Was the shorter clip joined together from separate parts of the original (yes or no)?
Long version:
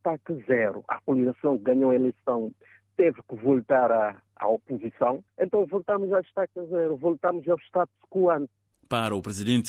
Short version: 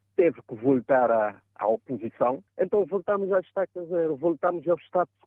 no